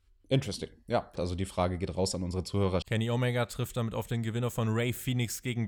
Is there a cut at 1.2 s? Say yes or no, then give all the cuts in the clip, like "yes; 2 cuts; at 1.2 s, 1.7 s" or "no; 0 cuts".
yes; 2 cuts; at 1.2 s, 2.8 s